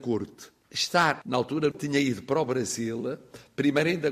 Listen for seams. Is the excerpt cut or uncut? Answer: cut